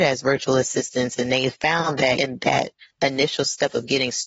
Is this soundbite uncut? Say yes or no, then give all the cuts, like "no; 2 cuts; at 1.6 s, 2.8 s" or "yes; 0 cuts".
no; 1 cut; at 2.2 s